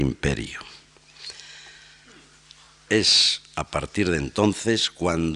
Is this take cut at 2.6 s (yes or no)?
no